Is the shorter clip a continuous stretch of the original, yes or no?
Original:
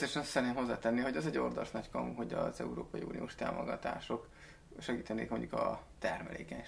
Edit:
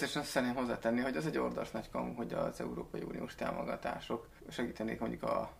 no